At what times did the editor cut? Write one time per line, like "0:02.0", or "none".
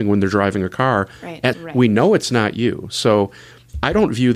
0:01.5